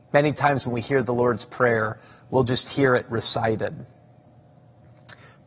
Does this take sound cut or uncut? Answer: uncut